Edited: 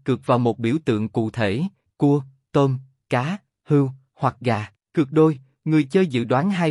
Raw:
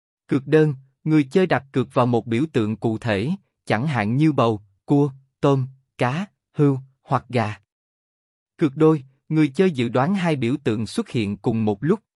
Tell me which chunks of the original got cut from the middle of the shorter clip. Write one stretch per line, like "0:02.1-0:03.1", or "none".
0:03.5-0:04.7
0:07.7-0:08.4